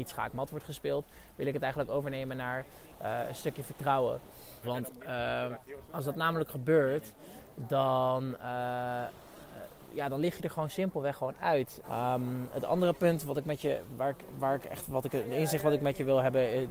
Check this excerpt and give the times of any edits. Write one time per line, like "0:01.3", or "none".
0:04.6
0:11.8